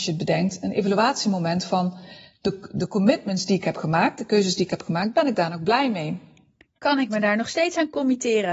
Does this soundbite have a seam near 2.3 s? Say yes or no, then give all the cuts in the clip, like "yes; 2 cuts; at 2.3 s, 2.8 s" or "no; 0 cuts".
no; 0 cuts